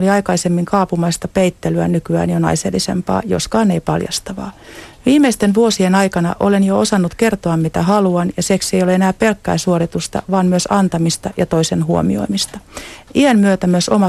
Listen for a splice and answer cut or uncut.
uncut